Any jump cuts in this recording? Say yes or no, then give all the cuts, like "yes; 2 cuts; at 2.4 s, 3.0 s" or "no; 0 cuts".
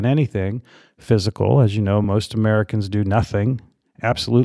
no; 0 cuts